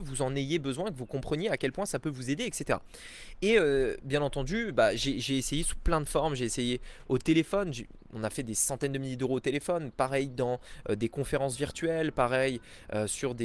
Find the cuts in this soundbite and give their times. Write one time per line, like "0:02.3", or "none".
none